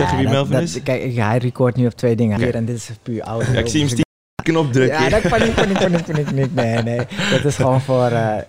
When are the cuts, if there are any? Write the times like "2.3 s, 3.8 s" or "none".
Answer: 2.4 s